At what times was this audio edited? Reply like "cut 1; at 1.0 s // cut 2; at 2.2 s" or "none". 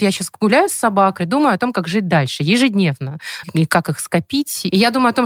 cut 1; at 1.2 s // cut 2; at 3.4 s